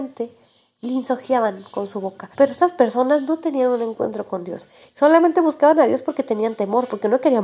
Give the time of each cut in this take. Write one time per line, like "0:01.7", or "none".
0:02.3